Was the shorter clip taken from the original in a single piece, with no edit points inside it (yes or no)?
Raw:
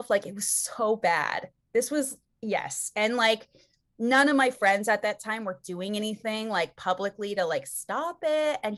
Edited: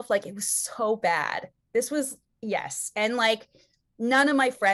yes